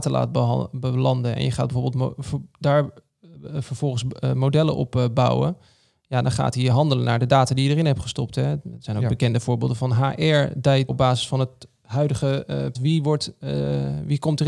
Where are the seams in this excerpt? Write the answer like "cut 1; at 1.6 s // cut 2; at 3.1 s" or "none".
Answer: cut 1; at 10.9 s // cut 2; at 12.7 s